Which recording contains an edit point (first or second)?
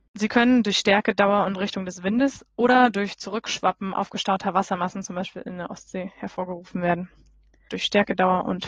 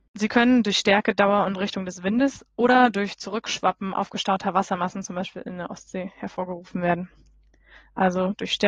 first